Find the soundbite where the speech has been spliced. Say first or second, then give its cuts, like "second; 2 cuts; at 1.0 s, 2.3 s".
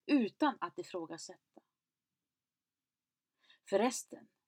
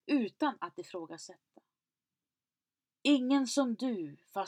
second; 1 cut; at 2.9 s